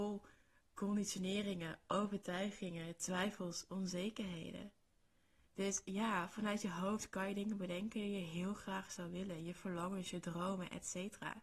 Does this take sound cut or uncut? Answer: uncut